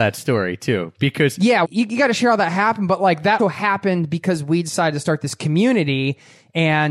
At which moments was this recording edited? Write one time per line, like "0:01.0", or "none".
0:01.6
0:03.4